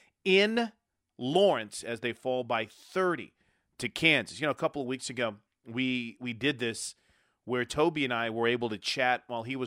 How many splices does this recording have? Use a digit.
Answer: 0